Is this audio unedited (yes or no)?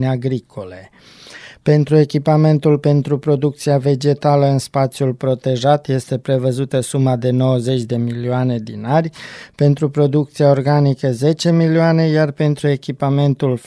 yes